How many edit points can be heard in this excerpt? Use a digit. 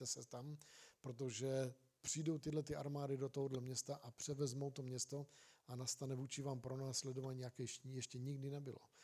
0